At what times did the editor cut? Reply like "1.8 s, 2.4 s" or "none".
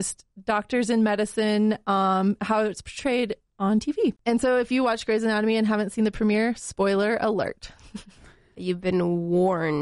4.2 s